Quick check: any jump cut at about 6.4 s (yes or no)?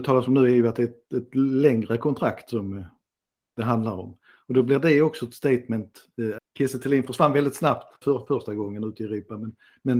yes